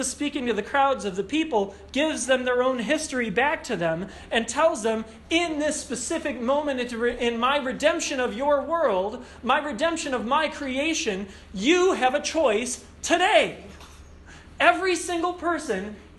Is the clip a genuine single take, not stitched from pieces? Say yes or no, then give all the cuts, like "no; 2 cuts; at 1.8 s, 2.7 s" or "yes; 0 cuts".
yes; 0 cuts